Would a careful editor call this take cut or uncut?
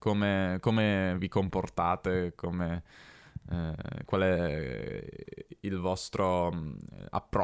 uncut